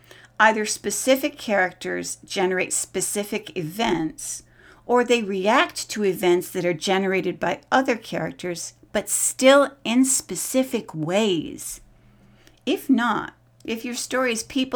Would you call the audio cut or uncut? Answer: uncut